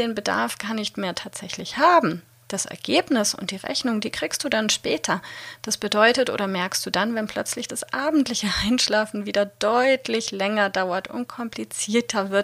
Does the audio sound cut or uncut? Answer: uncut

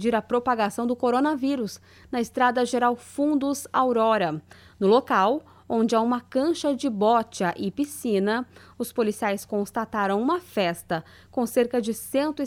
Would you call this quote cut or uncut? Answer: uncut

